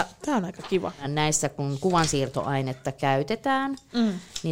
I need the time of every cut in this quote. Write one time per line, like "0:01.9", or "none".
none